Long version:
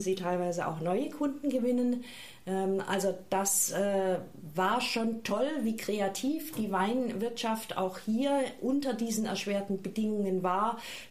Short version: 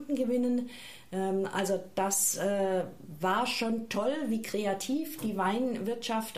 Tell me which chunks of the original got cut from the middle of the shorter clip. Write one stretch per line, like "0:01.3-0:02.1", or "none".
none